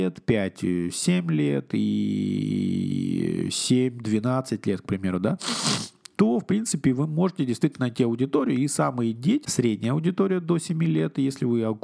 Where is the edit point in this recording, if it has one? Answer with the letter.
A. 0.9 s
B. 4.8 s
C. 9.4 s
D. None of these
C